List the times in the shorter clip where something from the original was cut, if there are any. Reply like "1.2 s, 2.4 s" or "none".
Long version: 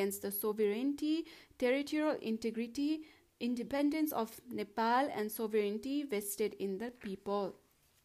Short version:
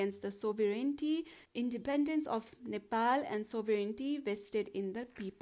1.4 s